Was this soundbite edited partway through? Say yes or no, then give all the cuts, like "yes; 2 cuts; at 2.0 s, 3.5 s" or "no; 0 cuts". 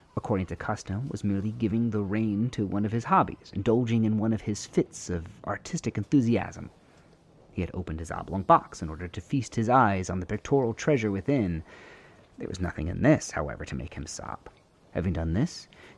yes; 1 cut; at 14.8 s